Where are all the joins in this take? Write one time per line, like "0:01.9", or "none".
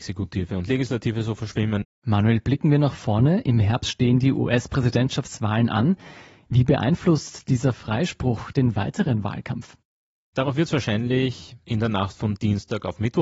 0:01.8